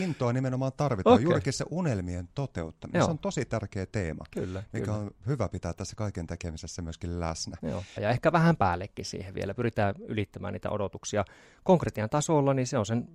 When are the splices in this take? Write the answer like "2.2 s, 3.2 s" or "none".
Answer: 8.0 s